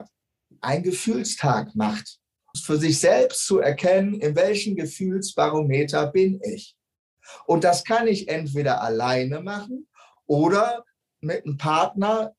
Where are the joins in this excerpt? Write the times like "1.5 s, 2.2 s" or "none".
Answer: 2.5 s